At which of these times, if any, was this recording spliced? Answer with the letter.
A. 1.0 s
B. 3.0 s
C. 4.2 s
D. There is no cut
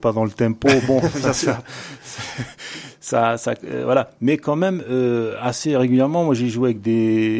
D